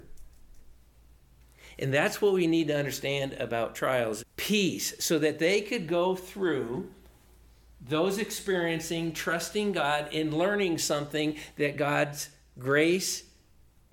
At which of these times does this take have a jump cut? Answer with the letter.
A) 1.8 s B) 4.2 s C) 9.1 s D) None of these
B